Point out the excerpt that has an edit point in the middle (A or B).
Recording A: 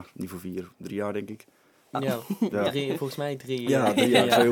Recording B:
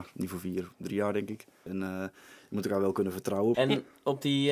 B